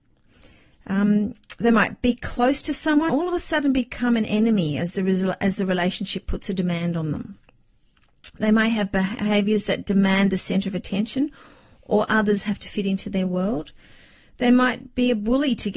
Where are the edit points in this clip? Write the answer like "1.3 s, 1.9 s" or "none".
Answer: 3.1 s